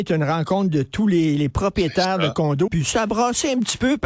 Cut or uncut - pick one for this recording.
cut